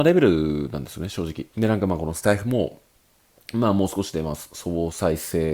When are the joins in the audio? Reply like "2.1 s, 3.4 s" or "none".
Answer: 1.5 s